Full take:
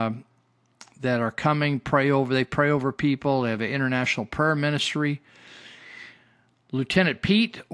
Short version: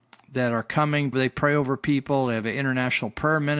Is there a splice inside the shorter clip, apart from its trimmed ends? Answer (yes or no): yes